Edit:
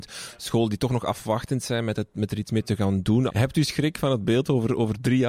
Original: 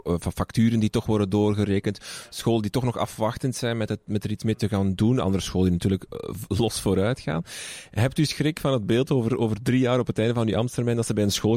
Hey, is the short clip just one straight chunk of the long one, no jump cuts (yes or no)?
no